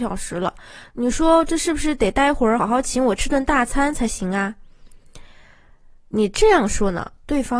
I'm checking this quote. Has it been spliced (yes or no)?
yes